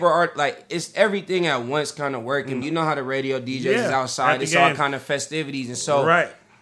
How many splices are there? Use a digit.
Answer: 1